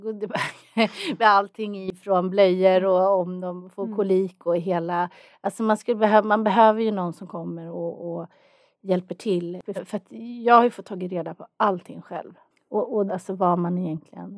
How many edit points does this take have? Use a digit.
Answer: 3